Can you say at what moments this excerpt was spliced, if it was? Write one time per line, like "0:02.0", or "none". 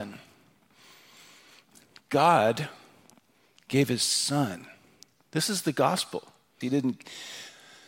0:06.6